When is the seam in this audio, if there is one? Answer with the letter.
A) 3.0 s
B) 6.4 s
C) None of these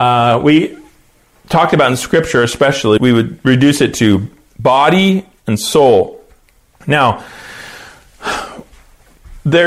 A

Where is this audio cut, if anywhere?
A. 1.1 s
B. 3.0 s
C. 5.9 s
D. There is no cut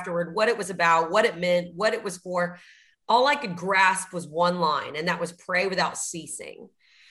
D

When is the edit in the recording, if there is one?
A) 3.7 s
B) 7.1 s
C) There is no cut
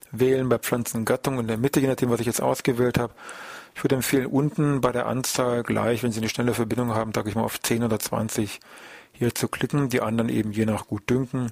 A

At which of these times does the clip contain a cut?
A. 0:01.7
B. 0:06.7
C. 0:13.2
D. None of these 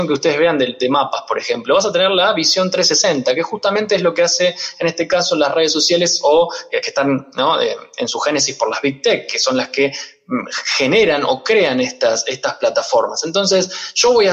B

